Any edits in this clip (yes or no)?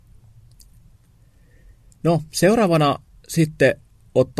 no